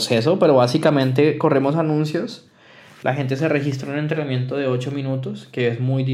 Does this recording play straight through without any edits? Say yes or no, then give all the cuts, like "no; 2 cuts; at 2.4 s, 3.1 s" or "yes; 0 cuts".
yes; 0 cuts